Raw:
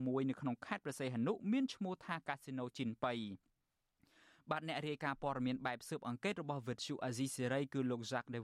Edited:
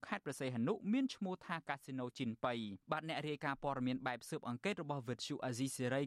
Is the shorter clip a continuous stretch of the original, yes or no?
no